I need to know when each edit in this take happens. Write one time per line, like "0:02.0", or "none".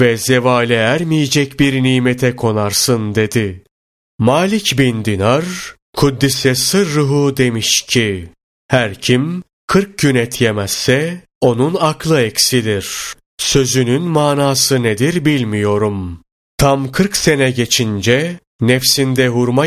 0:16.4